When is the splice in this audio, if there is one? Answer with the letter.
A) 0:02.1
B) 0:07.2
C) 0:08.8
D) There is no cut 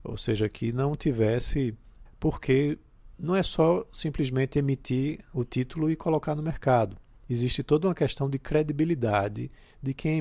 A